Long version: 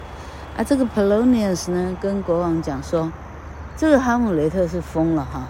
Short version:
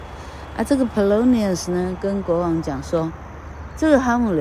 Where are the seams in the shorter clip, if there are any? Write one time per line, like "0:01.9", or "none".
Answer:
none